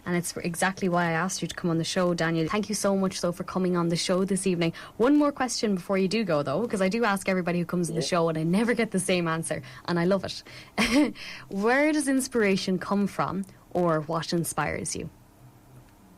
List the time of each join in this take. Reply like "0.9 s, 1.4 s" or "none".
2.4 s